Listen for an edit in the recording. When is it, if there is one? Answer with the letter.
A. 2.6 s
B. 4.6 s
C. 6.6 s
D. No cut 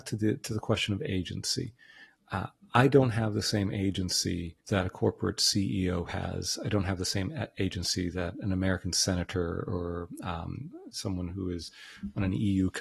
B